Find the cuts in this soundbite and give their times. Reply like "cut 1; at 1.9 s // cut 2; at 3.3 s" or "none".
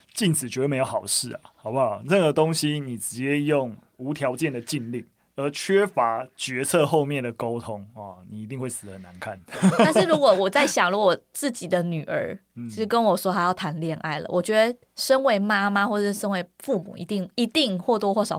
none